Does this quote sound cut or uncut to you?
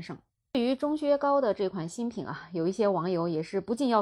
uncut